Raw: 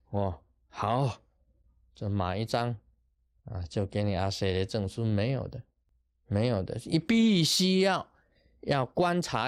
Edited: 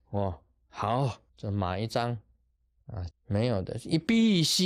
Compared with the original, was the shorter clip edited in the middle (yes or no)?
yes